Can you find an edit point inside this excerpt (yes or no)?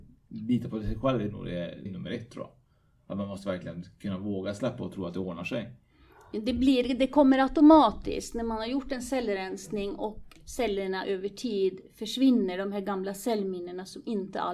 yes